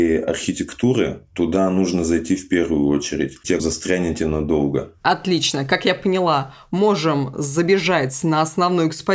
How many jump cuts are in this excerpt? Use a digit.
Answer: 1